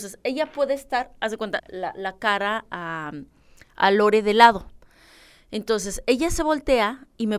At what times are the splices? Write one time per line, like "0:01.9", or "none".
0:01.6